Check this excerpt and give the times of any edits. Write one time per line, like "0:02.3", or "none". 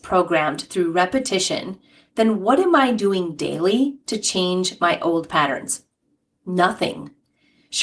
none